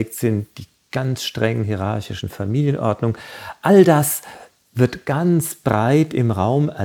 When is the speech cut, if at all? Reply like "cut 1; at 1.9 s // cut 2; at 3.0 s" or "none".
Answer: none